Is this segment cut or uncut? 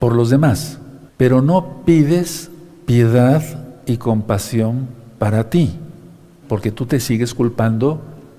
cut